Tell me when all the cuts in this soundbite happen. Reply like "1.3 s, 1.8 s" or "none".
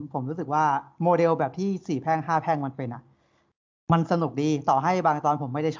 none